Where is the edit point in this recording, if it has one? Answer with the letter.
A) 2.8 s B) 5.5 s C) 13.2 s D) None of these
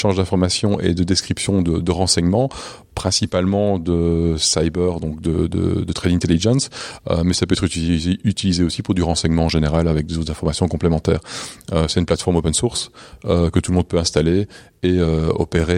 D